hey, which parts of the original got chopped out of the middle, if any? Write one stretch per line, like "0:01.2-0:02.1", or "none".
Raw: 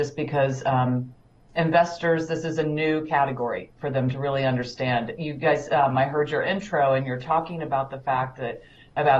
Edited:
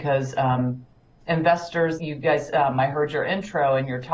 0:02.3-0:05.2